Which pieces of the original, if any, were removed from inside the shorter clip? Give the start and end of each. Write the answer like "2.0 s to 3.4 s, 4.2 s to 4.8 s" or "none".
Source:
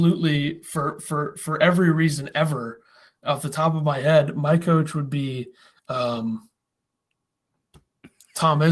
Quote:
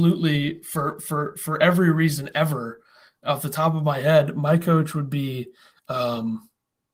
none